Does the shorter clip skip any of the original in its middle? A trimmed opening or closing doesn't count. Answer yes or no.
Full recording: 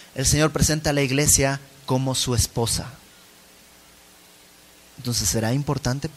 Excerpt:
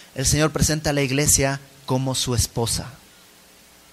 no